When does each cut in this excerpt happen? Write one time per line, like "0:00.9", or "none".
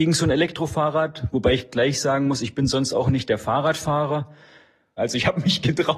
0:05.0